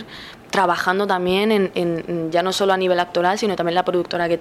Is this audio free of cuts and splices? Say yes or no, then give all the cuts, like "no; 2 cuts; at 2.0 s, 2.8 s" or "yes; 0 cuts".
yes; 0 cuts